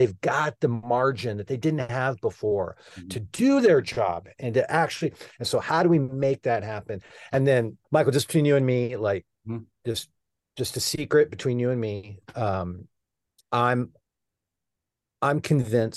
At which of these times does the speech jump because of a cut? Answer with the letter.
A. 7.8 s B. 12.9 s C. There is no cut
A